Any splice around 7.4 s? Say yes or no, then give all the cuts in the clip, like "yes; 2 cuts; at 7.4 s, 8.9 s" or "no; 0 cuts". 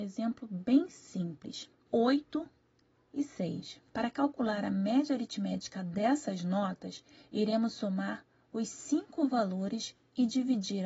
no; 2 cuts; at 1.9 s, 3.9 s